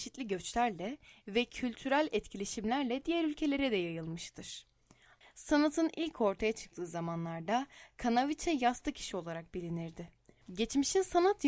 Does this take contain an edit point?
yes; 2 cuts; at 5.2 s, 10.4 s

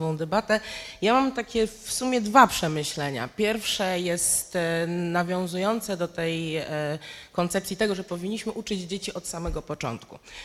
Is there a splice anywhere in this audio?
no; 0 cuts

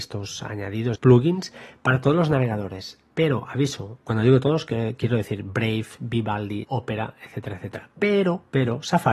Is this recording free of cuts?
no; 2 cuts; at 1.0 s, 6.6 s

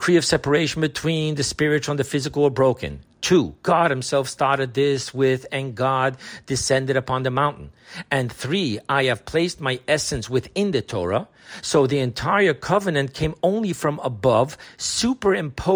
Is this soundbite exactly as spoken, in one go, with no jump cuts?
yes; 0 cuts

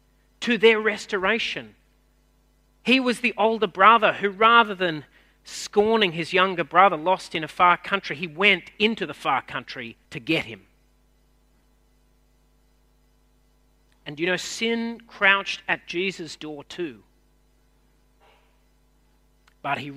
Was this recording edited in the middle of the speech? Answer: yes; 1 cut; at 10.0 s

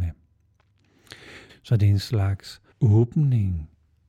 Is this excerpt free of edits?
no; 2 cuts; at 1.5 s, 2.7 s

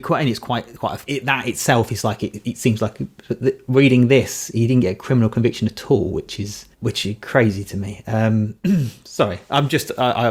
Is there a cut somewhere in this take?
yes; 2 cuts; at 1.1 s, 6.7 s

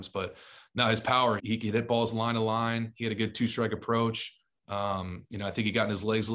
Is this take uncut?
no; 1 cut; at 1.4 s

